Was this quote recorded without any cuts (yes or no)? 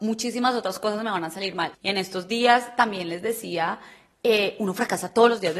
no